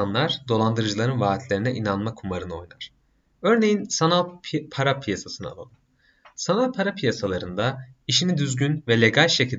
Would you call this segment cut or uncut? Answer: uncut